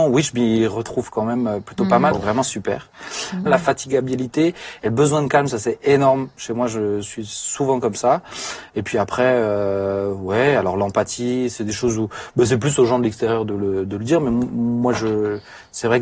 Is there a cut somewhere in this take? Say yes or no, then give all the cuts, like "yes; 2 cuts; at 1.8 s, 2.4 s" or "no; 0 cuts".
yes; 2 cuts; at 2.1 s, 3.5 s